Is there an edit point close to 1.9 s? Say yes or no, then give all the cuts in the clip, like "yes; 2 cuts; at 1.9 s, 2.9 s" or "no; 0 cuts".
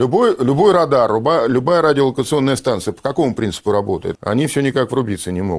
no; 1 cut; at 4.2 s